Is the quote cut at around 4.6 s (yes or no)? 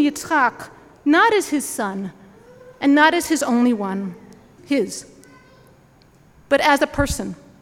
yes